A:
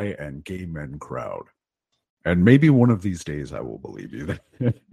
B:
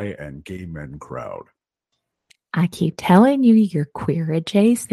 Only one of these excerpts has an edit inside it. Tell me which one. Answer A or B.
A